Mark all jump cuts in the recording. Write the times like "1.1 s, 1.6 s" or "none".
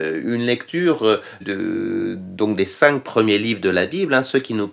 1.4 s

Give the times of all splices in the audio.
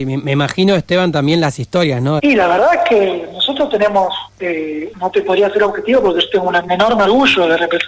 2.2 s, 4.9 s, 6.7 s

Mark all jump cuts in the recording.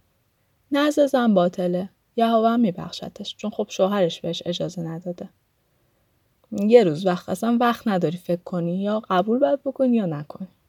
6.4 s

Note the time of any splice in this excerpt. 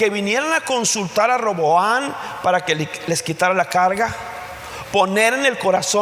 4.9 s

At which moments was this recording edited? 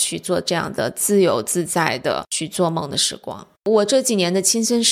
3.5 s

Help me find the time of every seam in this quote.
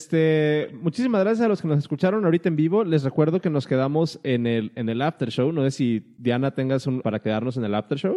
7.0 s

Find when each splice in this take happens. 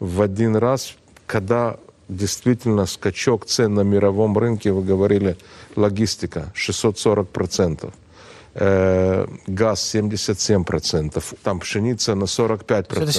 11.4 s

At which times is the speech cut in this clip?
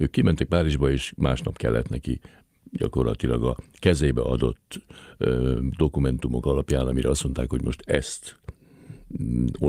none

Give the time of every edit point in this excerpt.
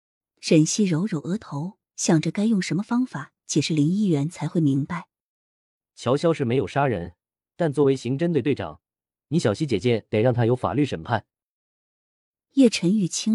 none

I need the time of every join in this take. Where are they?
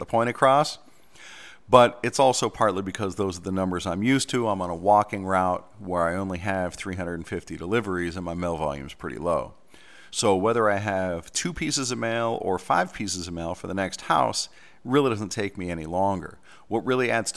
10.1 s

